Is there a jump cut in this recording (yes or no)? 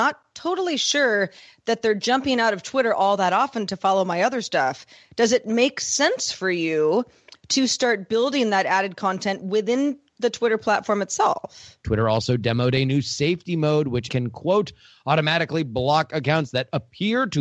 yes